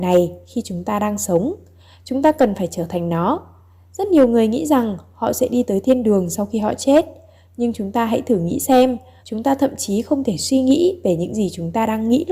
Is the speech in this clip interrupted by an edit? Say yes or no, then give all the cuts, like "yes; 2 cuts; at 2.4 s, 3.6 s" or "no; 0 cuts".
yes; 1 cut; at 9.2 s